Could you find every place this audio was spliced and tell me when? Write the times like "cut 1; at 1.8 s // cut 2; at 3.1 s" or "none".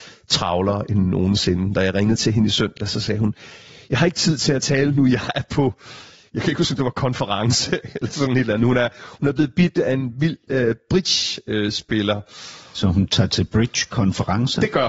none